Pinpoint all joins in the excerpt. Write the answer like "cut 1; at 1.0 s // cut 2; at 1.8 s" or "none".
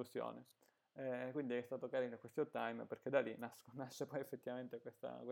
none